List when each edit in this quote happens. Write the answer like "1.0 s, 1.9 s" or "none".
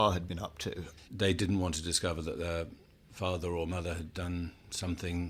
1.1 s